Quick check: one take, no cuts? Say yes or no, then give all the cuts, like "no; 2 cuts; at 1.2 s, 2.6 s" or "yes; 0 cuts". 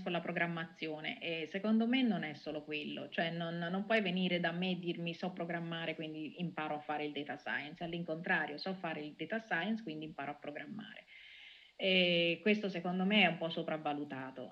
yes; 0 cuts